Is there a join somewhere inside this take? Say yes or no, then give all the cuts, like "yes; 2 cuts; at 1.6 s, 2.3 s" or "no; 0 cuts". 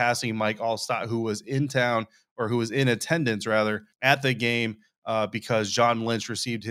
yes; 1 cut; at 3.9 s